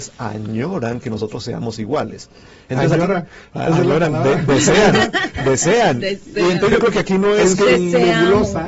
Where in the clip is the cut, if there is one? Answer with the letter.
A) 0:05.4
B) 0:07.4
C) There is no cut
C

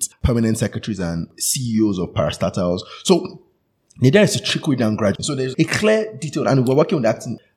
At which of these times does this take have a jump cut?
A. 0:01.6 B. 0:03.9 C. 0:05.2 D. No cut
C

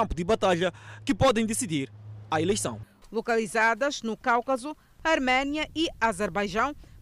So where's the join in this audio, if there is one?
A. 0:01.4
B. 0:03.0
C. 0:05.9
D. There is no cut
B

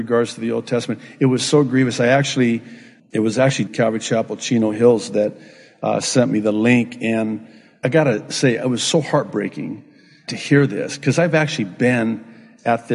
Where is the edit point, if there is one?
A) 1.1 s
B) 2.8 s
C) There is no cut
C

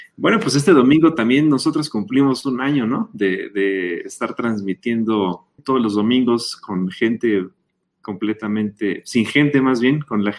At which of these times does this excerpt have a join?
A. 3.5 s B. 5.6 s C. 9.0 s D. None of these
B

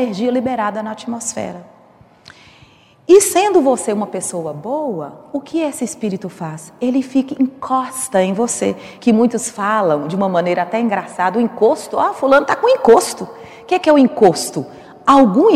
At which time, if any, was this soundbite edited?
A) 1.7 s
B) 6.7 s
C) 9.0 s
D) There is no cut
D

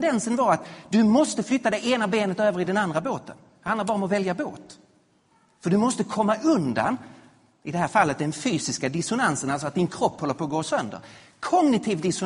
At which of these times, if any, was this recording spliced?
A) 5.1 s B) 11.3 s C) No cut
C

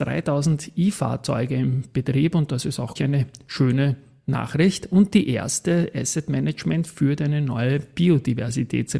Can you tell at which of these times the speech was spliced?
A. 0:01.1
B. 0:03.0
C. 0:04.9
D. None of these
B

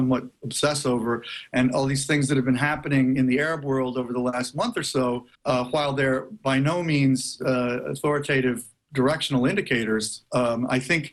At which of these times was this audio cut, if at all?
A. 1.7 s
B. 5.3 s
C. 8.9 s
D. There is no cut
B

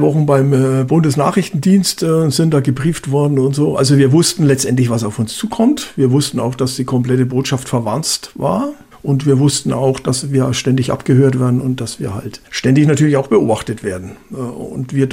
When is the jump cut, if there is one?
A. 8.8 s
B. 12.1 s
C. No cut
C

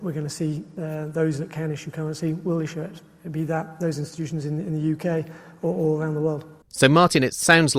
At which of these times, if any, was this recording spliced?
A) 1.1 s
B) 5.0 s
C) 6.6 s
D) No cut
C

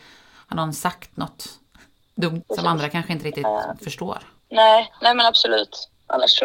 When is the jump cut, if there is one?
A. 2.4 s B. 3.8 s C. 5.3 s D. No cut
A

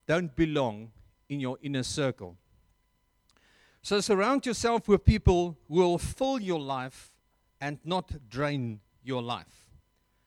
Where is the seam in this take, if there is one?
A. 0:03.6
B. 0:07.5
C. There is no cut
C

